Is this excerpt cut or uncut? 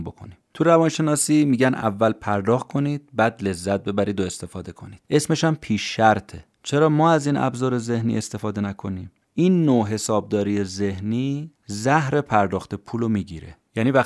cut